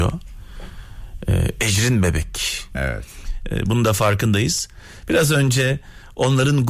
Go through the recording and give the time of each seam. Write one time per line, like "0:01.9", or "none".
0:02.7